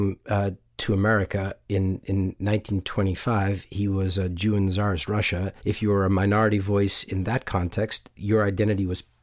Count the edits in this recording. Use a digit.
1